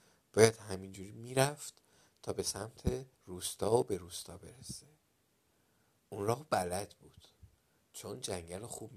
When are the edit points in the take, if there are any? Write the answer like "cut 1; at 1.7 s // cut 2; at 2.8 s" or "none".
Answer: cut 1; at 3.1 s